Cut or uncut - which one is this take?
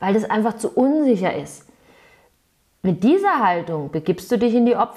uncut